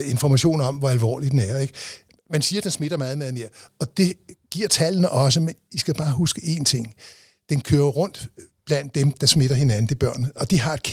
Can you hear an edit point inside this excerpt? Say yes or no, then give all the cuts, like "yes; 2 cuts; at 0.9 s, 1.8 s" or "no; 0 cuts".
no; 0 cuts